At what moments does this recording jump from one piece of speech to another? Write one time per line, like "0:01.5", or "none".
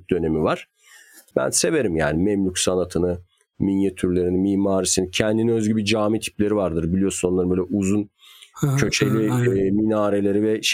0:01.3